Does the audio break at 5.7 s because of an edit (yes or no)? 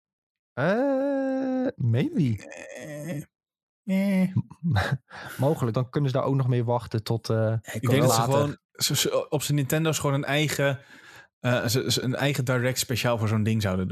yes